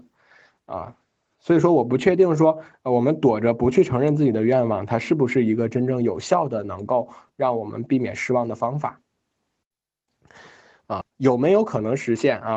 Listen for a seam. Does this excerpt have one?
yes; 1 cut; at 11.0 s

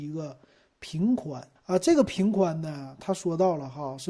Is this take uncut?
no; 1 cut; at 1.6 s

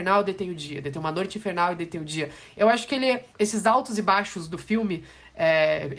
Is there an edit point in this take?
yes; 1 cut; at 3.3 s

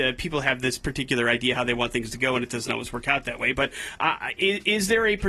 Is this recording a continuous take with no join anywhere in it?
yes; 0 cuts

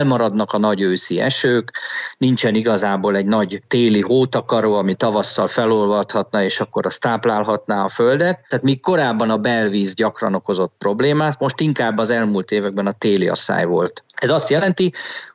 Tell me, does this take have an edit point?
no; 0 cuts

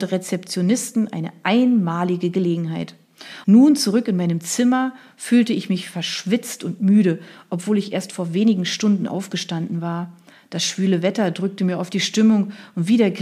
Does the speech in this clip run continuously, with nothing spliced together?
no; 1 cut; at 3.4 s

